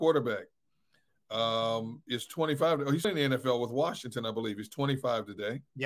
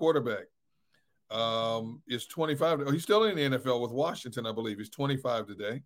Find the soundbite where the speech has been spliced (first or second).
first